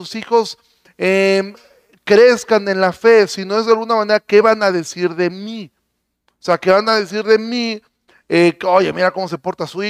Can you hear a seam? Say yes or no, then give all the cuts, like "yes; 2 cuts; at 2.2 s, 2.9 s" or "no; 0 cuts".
no; 0 cuts